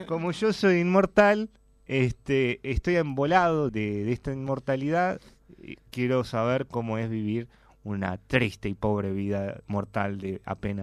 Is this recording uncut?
no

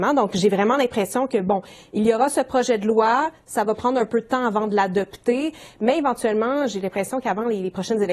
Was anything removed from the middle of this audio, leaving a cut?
no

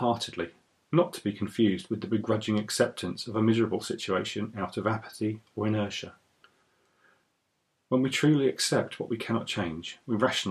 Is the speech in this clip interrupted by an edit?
no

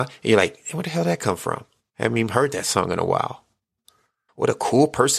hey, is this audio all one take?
no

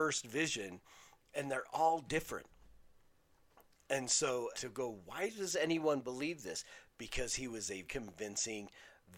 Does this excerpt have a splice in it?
yes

